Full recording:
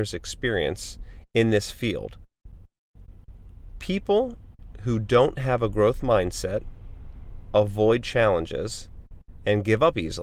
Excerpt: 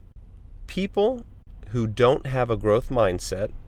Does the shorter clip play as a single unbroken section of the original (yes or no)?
yes